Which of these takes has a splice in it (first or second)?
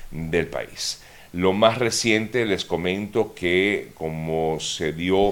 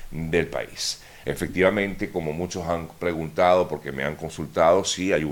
second